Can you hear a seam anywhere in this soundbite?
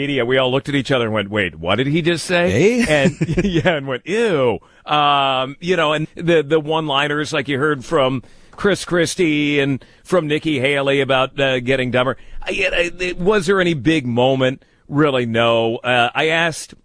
yes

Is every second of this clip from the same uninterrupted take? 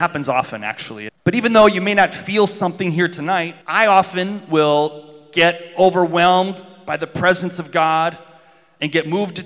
no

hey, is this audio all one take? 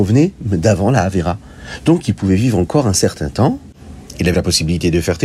no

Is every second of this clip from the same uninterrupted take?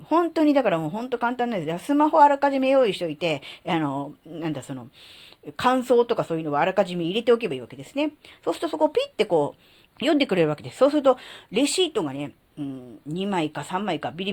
no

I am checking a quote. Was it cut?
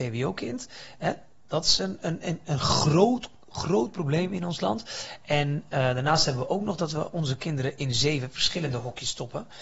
no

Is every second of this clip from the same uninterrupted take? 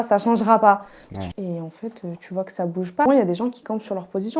no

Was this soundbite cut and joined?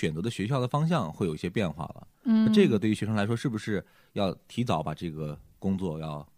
no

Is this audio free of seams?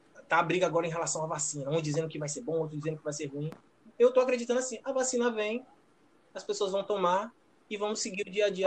yes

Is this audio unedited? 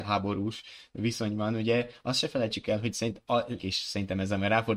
no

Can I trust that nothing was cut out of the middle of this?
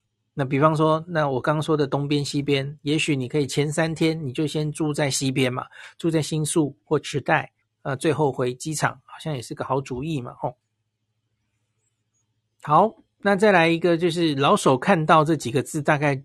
no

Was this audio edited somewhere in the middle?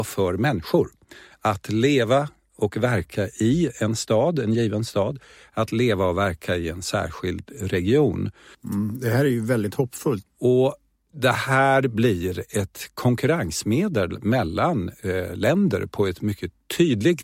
yes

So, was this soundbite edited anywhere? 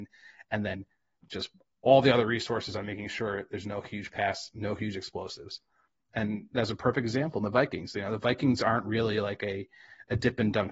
no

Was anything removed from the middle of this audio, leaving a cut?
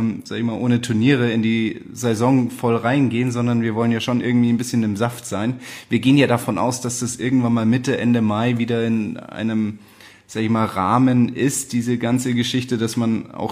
no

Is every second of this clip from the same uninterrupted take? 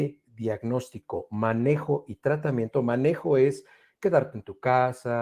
yes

